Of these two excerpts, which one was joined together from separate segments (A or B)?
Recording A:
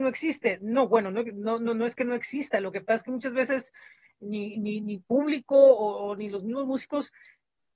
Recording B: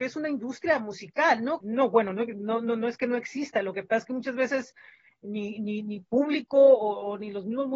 B